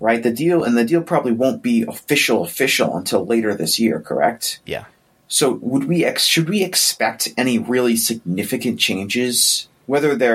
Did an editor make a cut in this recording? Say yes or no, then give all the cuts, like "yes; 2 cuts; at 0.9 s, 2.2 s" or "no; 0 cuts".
no; 0 cuts